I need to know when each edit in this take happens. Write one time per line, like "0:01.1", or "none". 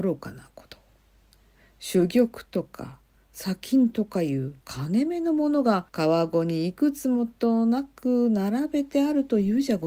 0:04.6
0:05.9